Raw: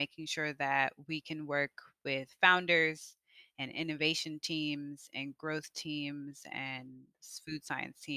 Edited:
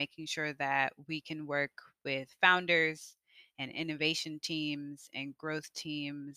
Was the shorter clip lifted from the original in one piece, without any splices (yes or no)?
yes